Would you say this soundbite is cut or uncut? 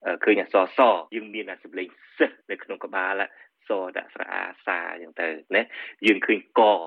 cut